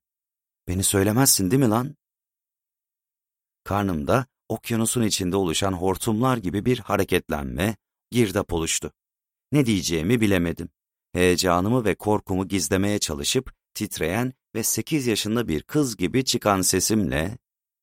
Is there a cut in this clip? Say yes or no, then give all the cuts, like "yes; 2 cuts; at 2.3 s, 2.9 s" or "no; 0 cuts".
yes; 1 cut; at 8.1 s